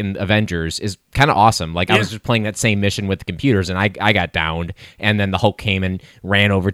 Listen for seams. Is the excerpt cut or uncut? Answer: uncut